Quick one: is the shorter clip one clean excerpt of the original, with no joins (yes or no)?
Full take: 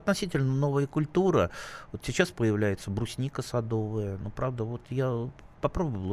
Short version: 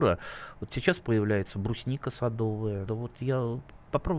no